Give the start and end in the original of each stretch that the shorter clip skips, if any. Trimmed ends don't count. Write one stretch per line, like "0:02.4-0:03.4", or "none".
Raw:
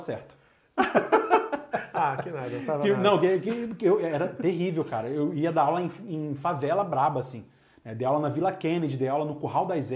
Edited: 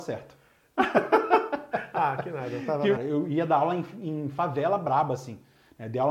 0:03.0-0:05.0